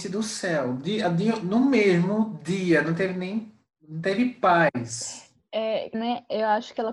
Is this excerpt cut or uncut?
cut